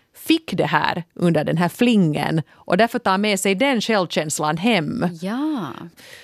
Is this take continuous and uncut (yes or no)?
yes